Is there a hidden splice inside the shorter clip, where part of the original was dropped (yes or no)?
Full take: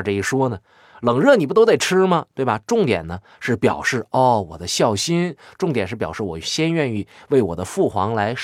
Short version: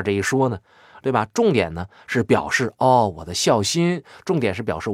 yes